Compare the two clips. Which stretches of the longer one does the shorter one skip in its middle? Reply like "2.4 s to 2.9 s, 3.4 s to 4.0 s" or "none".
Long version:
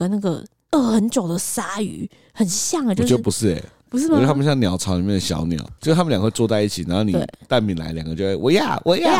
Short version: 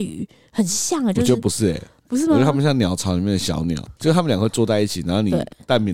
none